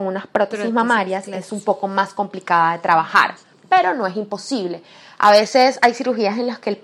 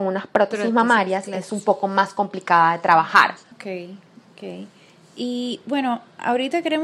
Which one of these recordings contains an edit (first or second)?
second